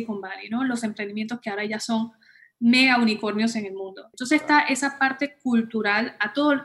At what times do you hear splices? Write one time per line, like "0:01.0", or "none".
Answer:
0:04.1